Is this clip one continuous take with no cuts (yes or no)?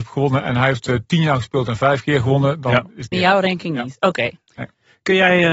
no